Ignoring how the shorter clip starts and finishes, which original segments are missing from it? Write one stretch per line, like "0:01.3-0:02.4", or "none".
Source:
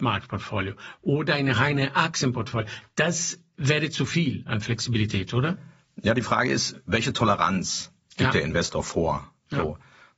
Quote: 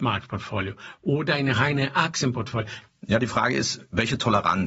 0:02.9-0:05.8